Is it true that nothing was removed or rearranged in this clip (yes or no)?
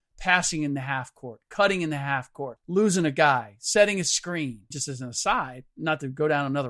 no